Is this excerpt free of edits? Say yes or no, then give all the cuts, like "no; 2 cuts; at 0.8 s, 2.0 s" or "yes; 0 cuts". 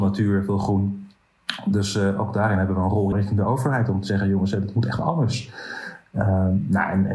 no; 1 cut; at 3.1 s